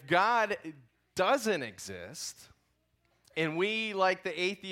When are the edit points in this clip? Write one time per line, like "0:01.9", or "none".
none